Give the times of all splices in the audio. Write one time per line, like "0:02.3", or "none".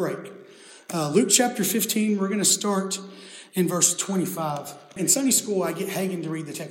none